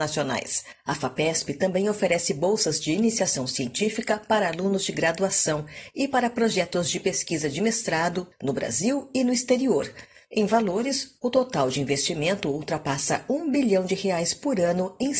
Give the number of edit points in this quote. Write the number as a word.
two